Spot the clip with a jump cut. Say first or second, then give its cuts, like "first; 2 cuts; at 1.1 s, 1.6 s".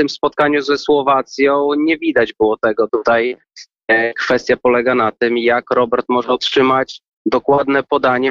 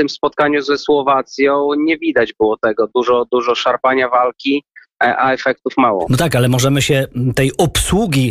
first; 1 cut; at 2.9 s